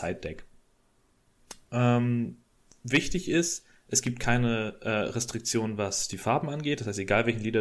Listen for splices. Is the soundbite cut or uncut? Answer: uncut